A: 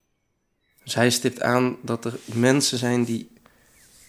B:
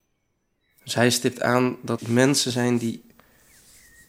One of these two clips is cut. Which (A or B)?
B